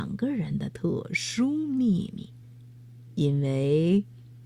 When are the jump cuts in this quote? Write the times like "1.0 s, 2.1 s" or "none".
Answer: 2.4 s